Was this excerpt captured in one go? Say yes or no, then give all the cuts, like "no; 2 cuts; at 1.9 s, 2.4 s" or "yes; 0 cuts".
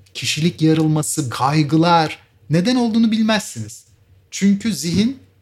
no; 1 cut; at 1.3 s